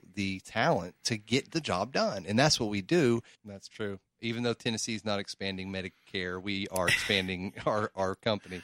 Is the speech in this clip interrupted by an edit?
yes; 1 cut; at 3.4 s

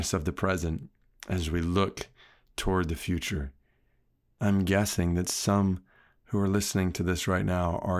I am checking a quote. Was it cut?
yes; 1 cut; at 4.4 s

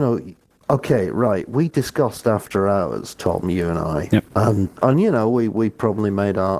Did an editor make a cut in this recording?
yes; 1 cut; at 4.8 s

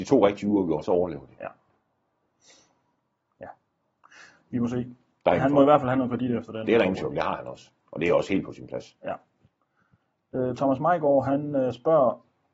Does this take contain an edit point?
yes; 1 cut; at 5.4 s

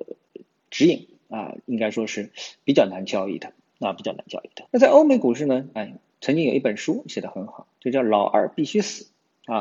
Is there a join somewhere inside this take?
yes; 2 cuts; at 4.7 s, 5.8 s

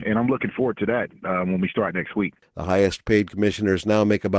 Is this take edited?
yes; 1 cut; at 2.4 s

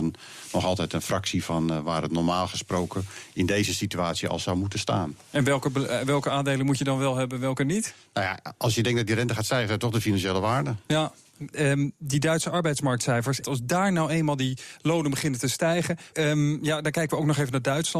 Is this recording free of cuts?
no; 3 cuts; at 11.5 s, 13.4 s, 16.1 s

